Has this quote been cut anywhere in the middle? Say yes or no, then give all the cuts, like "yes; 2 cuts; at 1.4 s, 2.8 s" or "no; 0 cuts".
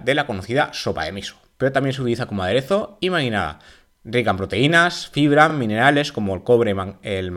no; 0 cuts